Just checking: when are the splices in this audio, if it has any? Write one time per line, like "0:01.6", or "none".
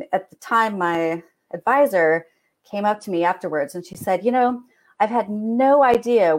none